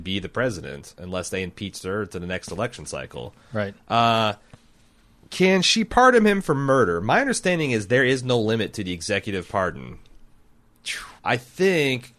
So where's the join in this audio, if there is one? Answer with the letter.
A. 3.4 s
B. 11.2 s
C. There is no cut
B